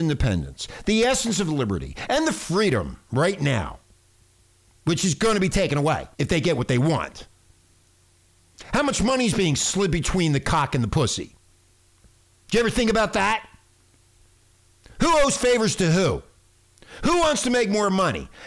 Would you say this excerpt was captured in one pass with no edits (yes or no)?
no